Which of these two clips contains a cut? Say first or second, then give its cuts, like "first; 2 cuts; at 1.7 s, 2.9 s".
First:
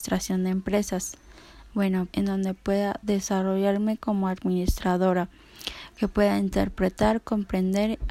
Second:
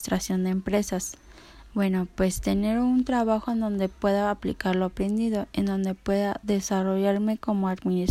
first; 1 cut; at 2.1 s